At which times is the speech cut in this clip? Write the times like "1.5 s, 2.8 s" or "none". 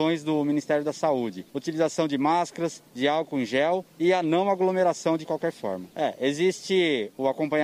1.5 s, 5.9 s

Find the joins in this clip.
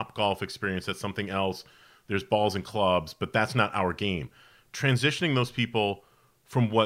none

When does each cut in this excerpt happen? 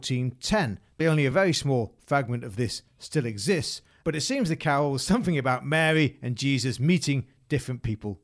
1.0 s

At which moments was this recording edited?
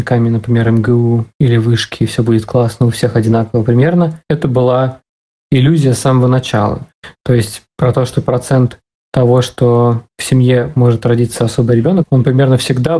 none

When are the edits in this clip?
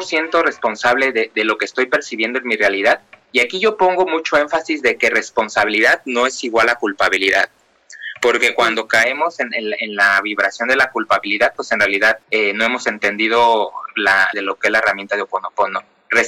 12.2 s, 14.3 s

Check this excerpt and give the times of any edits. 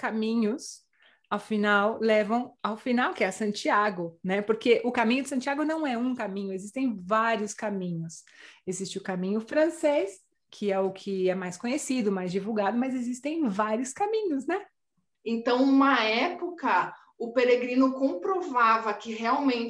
15.1 s

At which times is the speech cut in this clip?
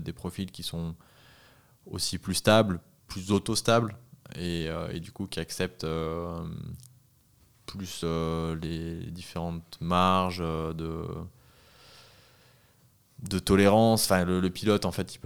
none

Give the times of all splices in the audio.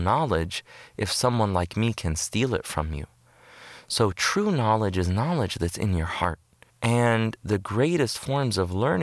6.7 s

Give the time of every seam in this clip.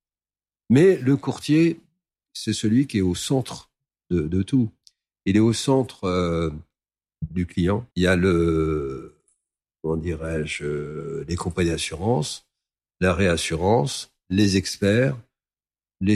7.9 s

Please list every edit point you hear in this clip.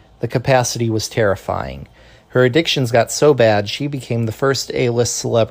none

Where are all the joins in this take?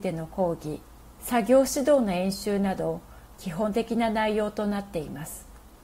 1.1 s

